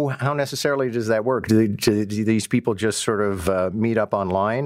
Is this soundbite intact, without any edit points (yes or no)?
yes